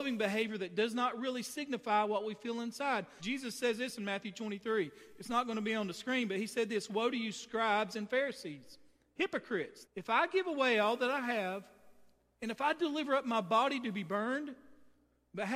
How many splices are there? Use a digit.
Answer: 2